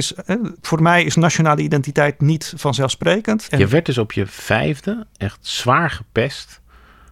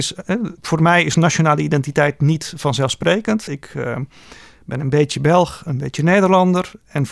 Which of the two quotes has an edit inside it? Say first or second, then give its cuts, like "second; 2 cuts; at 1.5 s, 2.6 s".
first; 2 cuts; at 3.5 s, 5.1 s